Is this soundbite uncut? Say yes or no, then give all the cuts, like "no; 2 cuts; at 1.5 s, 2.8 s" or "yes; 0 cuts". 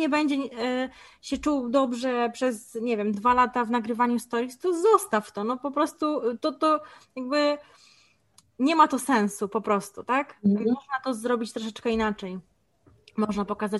yes; 0 cuts